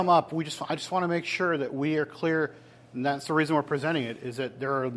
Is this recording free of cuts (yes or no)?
yes